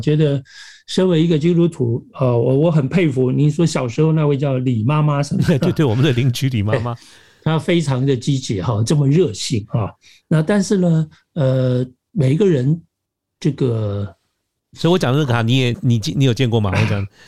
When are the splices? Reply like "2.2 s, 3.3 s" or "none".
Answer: 14.7 s, 15.7 s

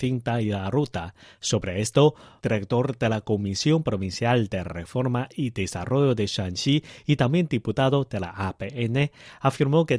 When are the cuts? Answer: 2.4 s

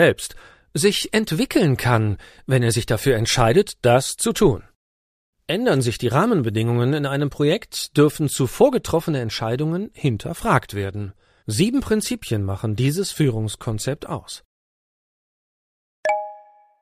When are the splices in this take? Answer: 5.3 s, 11.4 s

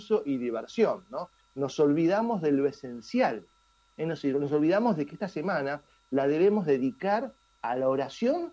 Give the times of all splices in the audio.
none

